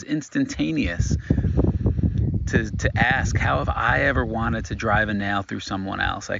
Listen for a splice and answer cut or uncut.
uncut